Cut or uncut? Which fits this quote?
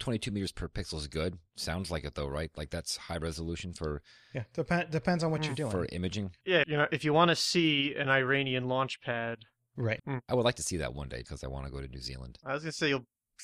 cut